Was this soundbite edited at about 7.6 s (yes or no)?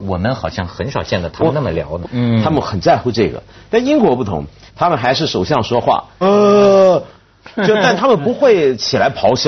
no